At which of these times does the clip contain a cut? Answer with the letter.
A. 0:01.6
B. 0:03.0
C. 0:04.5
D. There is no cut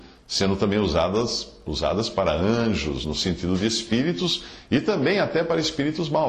D